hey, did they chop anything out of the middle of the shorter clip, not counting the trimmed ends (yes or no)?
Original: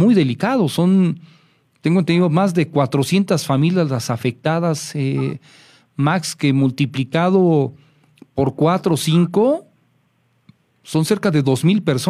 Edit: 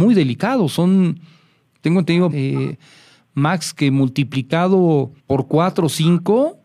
yes